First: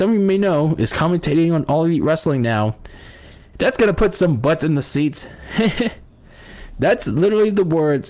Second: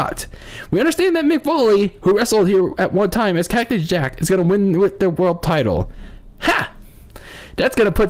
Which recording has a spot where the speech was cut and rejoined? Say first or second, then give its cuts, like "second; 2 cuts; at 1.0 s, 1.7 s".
first; 1 cut; at 3.5 s